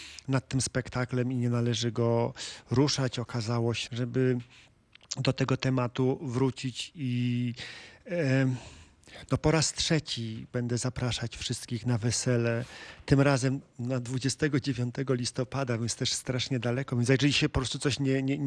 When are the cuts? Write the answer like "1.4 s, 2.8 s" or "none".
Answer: 3.9 s